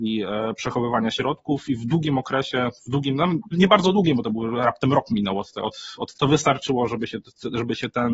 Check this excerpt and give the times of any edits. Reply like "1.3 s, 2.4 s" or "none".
3.5 s, 6.1 s